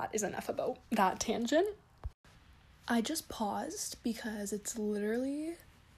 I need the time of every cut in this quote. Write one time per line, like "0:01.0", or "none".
none